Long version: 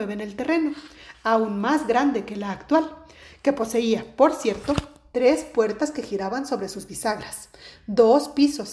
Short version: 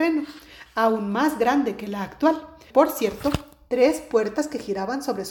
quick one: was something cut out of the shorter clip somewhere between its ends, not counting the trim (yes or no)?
yes